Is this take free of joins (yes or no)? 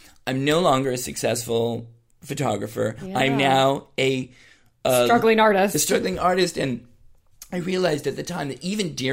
yes